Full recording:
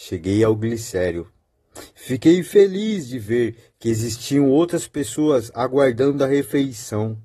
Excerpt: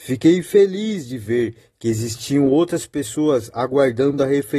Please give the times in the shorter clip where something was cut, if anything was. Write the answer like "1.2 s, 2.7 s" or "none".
none